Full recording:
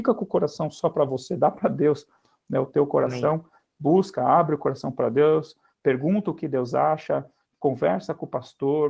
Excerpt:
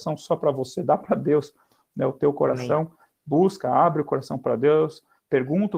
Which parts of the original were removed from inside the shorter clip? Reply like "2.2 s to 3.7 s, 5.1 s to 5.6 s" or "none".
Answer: none